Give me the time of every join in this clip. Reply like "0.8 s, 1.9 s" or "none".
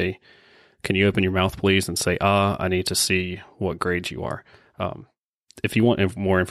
none